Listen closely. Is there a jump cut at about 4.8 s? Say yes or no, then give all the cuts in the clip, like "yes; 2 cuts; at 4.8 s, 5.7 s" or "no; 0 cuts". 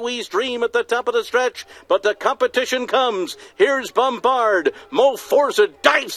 no; 0 cuts